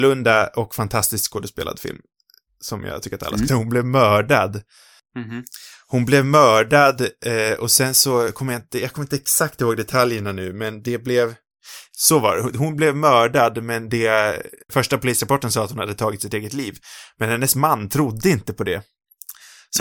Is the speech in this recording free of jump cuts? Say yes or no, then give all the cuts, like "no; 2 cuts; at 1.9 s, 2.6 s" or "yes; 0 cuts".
no; 3 cuts; at 3.5 s, 5.0 s, 14.7 s